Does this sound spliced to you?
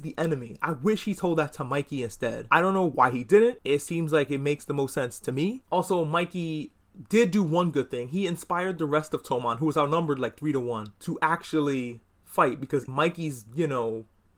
yes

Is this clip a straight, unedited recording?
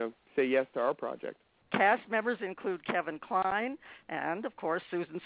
no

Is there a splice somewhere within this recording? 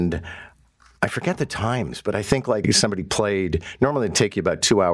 yes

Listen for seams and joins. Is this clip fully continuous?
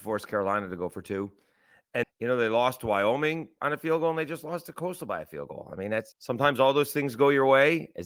no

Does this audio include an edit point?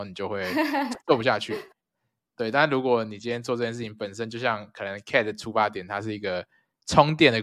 no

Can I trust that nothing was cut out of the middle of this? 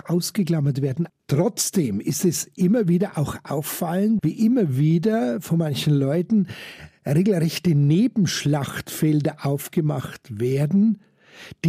no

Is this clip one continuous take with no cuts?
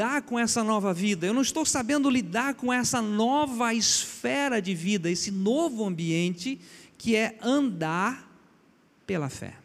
yes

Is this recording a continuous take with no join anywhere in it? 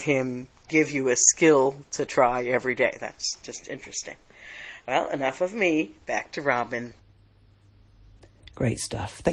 yes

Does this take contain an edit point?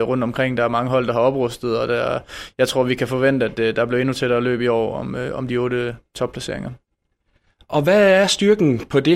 no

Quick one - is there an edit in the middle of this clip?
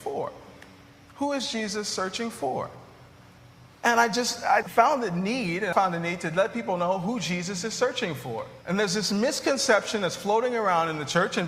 yes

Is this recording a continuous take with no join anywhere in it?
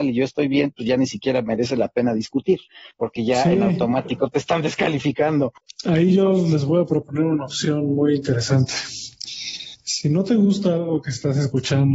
yes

